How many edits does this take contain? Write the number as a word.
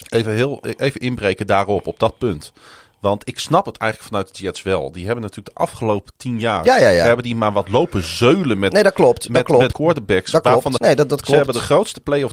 two